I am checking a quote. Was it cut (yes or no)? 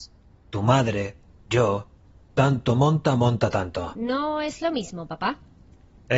no